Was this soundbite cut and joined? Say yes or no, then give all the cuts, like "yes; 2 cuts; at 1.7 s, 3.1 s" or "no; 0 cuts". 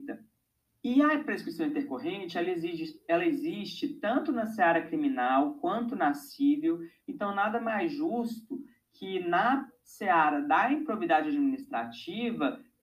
yes; 1 cut; at 5.6 s